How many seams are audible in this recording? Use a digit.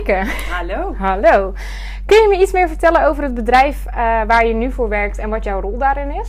0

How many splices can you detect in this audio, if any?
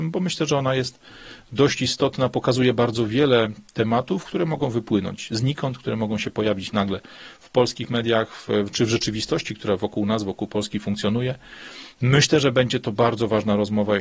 0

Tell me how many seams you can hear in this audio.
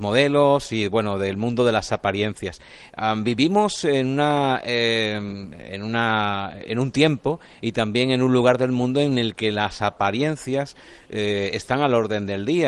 0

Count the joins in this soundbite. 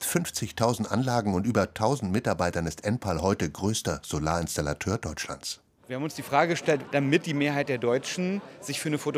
1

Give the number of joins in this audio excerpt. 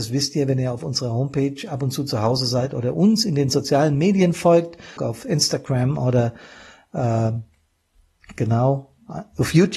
1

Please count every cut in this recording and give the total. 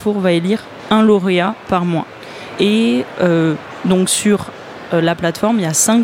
1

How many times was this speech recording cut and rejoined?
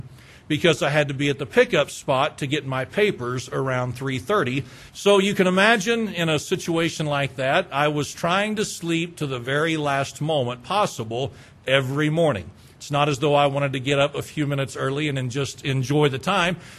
1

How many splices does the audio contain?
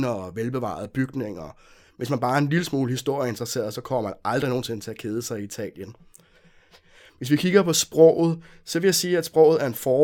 0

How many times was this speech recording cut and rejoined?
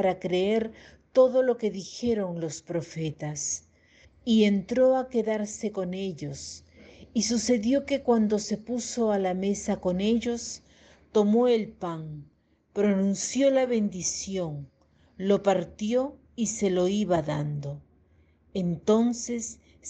1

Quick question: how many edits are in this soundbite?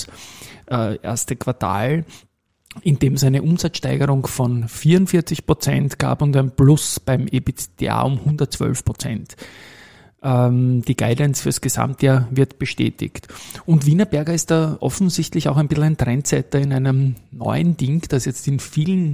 0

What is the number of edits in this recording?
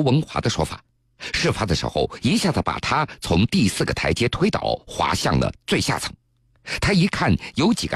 2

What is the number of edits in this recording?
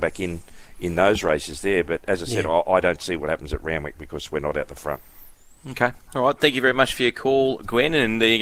0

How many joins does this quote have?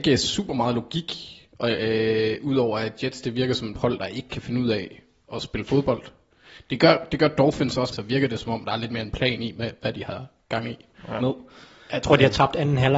2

